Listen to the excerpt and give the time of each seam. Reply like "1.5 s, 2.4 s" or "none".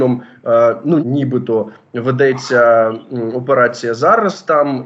1.0 s